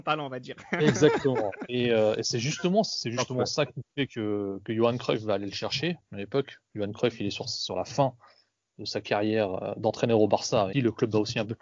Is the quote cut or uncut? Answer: cut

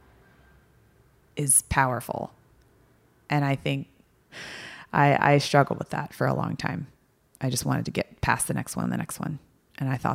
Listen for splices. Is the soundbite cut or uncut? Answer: cut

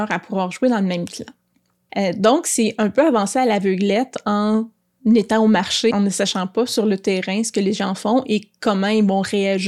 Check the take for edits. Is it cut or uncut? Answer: cut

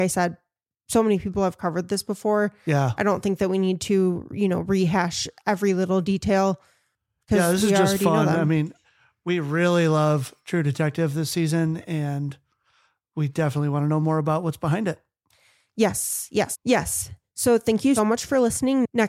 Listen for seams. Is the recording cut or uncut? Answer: cut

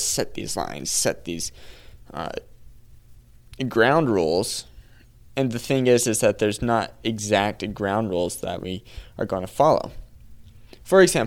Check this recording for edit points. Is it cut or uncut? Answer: uncut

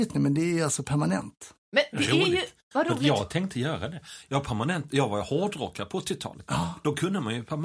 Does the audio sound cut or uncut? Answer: uncut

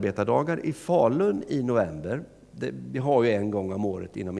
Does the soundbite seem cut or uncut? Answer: uncut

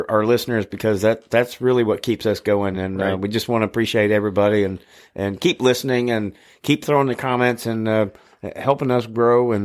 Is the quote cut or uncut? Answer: uncut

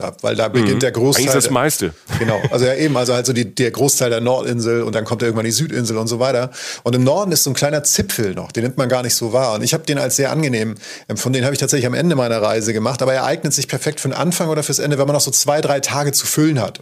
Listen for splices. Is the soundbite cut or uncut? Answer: uncut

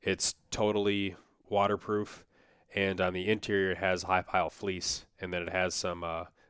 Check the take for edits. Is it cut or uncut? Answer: uncut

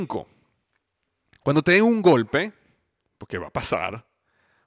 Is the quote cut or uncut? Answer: uncut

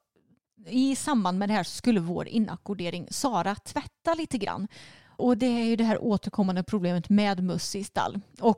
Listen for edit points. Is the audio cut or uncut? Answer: cut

